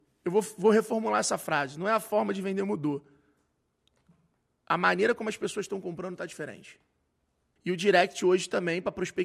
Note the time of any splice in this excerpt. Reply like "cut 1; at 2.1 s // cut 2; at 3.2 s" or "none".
cut 1; at 7.6 s